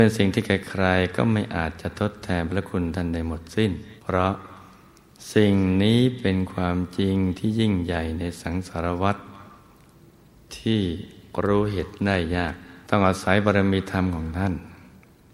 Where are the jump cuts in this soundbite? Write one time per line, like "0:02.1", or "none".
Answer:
0:04.0
0:12.8